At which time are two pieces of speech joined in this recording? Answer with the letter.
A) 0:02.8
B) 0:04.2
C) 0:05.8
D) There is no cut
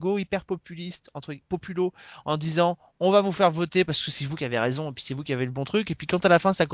D